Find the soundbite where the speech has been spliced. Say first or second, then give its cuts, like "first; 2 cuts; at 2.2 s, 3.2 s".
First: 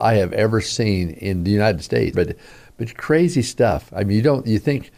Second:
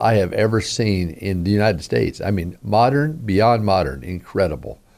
first; 1 cut; at 2.1 s